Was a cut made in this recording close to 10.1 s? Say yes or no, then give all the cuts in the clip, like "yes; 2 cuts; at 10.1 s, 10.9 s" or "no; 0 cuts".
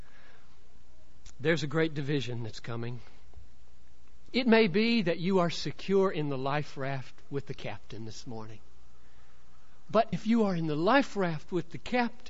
yes; 2 cuts; at 4.3 s, 10.1 s